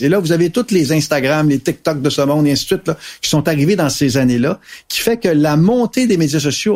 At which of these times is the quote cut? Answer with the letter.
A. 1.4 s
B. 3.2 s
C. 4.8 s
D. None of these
D